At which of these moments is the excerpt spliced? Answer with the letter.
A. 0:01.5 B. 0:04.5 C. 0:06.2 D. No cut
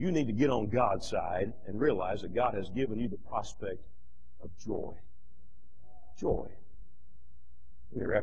D